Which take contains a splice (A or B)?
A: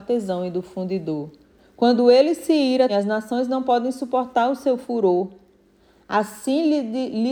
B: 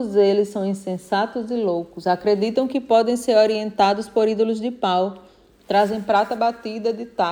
A